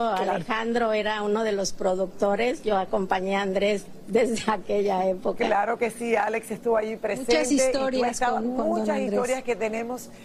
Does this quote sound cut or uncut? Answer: uncut